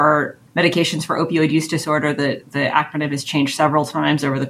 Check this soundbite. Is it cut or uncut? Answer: uncut